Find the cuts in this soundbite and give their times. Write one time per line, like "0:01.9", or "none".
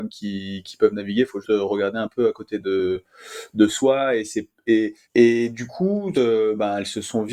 0:01.4
0:05.0
0:06.1